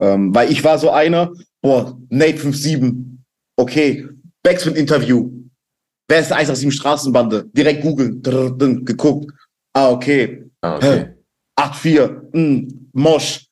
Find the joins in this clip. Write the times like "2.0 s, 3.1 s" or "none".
none